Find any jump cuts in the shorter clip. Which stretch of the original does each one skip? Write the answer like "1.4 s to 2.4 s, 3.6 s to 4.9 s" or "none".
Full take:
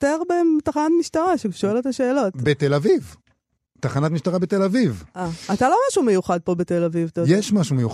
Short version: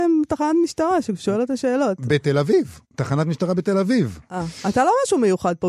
3.2 s to 3.7 s